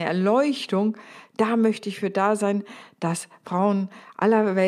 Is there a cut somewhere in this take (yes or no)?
no